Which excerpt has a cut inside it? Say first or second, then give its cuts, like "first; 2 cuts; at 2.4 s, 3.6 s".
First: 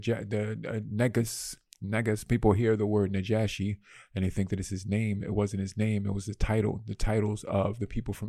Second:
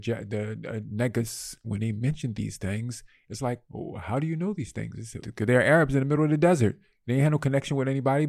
second; 3 cuts; at 1.6 s, 3.6 s, 5.2 s